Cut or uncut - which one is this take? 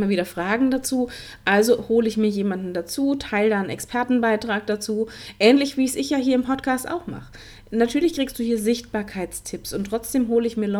uncut